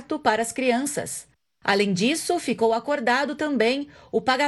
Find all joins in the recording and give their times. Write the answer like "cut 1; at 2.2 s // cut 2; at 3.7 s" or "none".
none